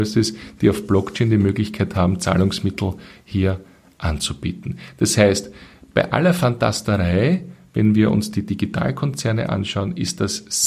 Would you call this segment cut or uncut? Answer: uncut